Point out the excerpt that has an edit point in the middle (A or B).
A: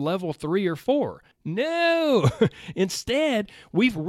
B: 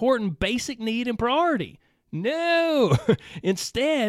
A